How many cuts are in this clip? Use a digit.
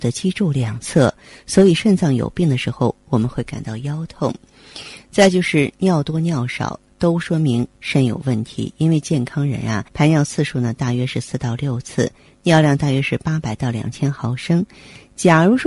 1